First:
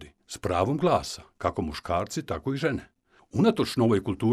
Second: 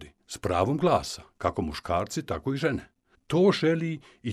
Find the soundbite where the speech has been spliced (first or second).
second